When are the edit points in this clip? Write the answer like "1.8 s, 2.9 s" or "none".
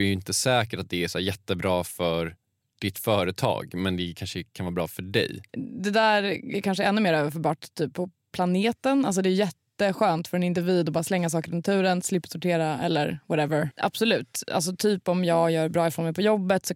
12.0 s, 13.7 s